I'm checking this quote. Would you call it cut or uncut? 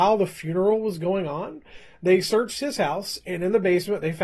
uncut